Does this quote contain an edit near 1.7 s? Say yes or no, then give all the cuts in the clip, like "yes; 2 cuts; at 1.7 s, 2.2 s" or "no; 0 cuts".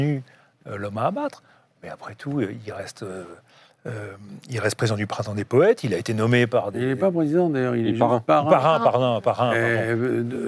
no; 0 cuts